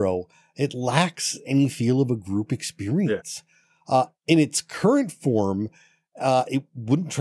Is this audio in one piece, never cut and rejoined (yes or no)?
yes